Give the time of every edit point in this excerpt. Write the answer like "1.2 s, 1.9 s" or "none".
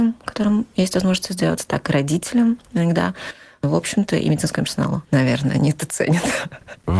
5.1 s